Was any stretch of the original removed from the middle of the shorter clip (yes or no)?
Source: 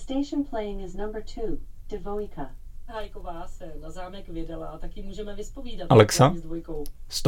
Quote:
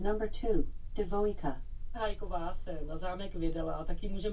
no